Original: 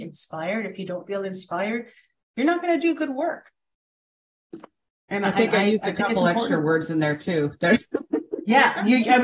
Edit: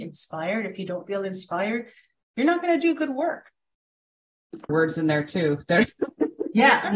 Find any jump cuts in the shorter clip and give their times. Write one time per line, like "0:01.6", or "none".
0:04.7